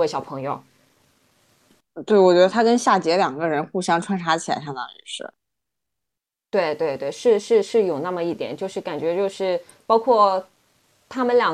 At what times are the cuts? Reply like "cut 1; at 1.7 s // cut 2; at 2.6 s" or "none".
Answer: none